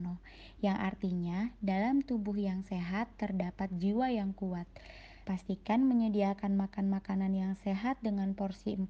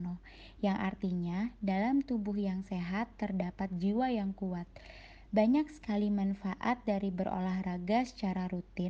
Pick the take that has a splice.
first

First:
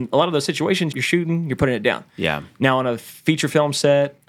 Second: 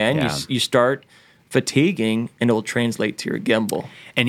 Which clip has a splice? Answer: first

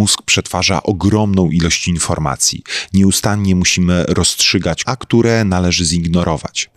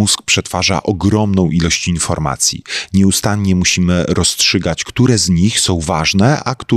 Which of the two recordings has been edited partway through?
first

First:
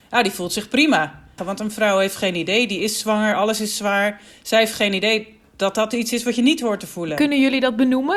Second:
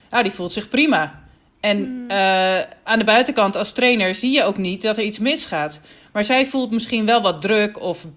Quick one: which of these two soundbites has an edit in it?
first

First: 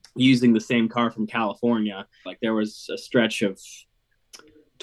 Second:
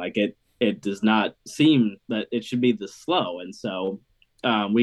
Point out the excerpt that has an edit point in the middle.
first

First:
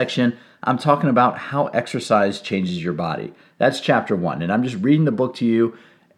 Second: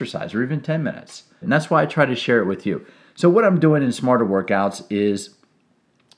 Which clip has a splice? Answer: second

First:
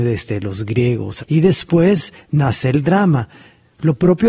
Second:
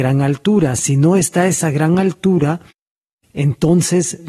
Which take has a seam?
first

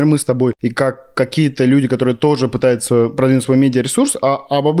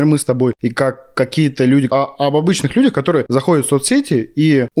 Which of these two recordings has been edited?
second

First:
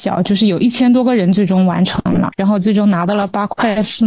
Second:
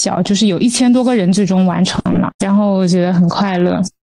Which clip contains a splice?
second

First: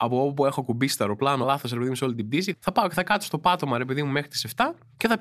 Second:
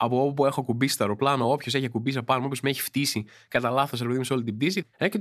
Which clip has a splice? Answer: first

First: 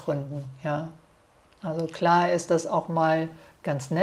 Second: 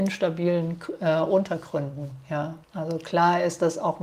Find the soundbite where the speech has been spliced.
second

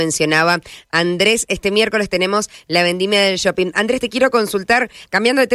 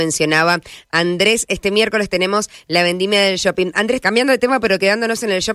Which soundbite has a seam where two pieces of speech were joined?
second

